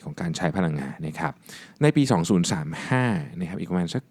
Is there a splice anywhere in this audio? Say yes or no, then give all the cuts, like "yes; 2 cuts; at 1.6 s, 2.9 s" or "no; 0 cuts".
yes; 1 cut; at 1.0 s